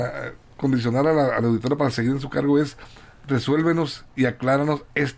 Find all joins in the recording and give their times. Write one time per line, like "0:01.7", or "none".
none